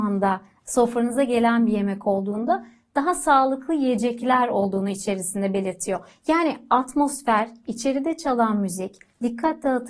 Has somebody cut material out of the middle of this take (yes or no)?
no